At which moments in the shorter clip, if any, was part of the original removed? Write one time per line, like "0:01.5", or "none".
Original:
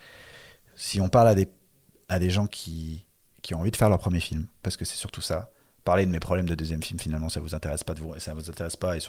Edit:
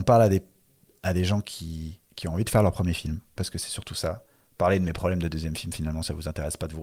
0:02.1